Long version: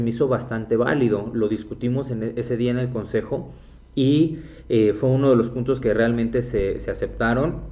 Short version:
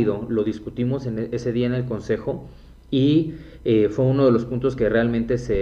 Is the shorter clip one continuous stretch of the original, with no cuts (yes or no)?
yes